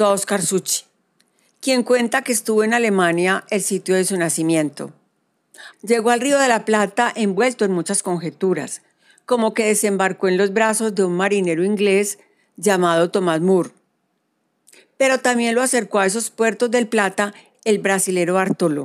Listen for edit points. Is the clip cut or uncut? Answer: cut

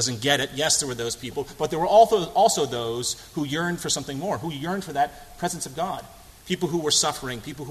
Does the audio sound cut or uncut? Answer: uncut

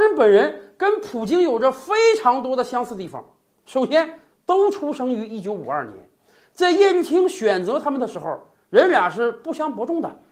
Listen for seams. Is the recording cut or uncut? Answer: cut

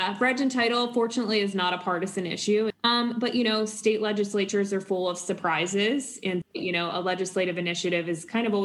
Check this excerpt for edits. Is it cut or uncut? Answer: cut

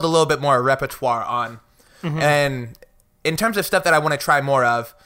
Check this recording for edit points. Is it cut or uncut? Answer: uncut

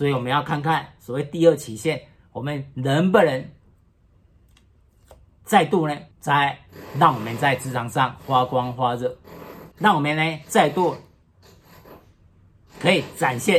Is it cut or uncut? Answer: cut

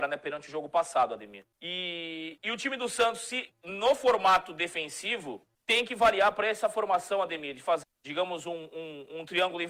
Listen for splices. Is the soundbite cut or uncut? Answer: cut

